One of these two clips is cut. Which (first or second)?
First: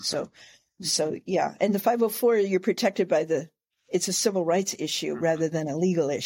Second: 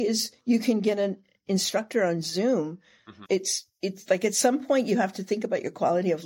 second